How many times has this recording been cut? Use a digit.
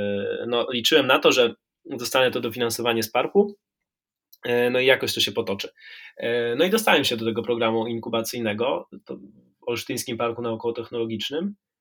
0